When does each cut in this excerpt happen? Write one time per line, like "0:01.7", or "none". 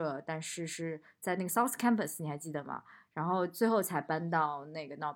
none

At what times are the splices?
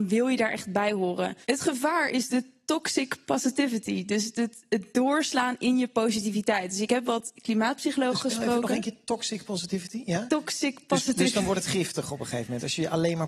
0:01.4

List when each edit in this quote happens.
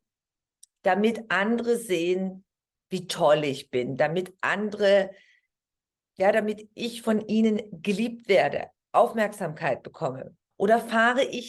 0:10.5

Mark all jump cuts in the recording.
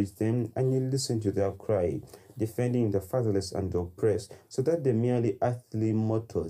none

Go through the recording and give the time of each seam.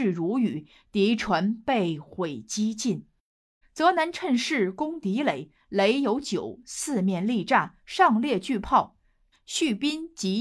0:03.6
0:09.3

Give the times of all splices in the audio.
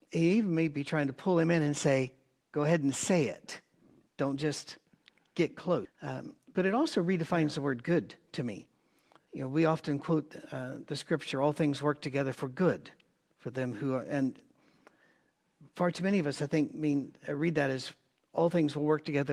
0:05.8

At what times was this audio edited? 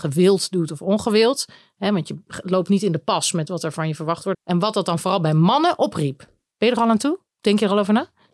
0:04.3
0:06.5

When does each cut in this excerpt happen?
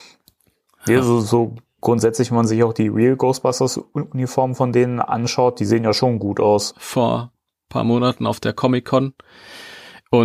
0:06.7

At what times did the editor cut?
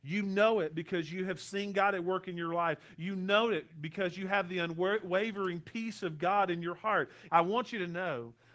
0:07.3

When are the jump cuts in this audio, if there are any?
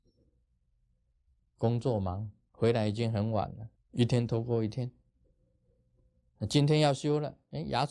0:01.4
0:03.8

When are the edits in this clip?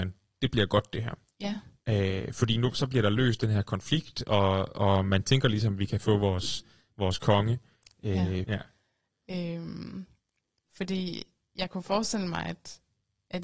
0:08.4

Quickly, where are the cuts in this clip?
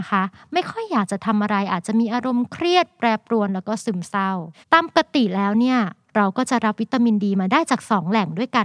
0:04.6

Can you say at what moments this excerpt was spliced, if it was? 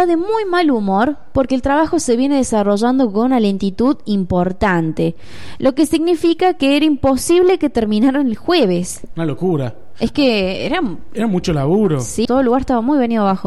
0:12.3

